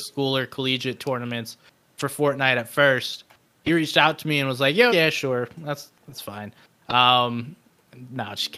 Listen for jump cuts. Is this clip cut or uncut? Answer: cut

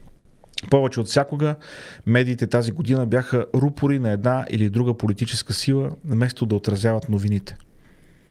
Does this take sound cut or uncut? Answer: uncut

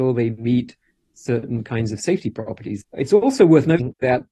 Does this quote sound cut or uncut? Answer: cut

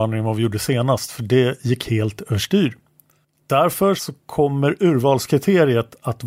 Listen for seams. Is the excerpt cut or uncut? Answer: cut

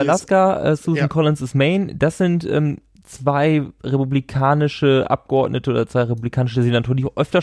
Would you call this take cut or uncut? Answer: uncut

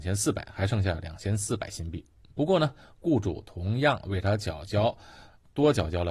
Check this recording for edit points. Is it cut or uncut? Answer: uncut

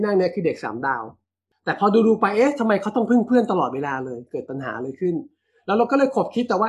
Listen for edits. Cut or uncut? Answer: uncut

